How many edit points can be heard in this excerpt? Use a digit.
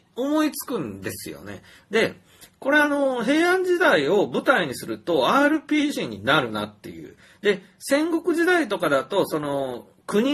0